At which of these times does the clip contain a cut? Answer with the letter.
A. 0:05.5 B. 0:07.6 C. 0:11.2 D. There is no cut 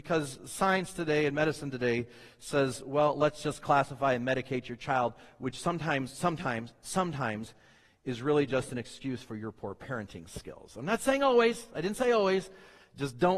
D